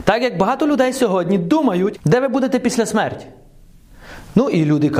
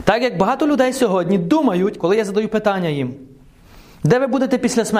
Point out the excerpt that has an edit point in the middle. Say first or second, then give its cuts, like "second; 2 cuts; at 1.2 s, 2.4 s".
first; 1 cut; at 2.0 s